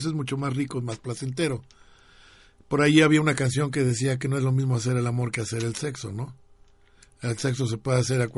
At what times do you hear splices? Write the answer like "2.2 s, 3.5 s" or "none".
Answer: none